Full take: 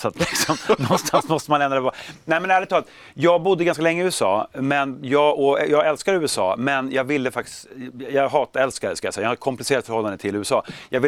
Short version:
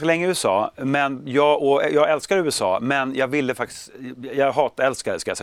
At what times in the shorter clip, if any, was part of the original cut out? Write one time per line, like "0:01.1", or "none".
none